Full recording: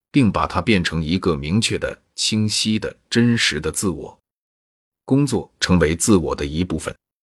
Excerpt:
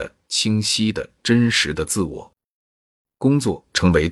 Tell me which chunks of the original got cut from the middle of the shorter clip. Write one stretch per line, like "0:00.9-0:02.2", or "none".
none